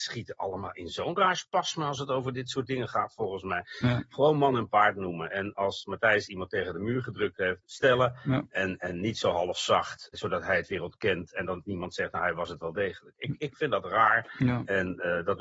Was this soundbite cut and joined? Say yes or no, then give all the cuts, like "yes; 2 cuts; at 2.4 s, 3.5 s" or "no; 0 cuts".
yes; 2 cuts; at 7.6 s, 10.1 s